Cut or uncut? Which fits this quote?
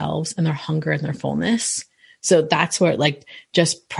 uncut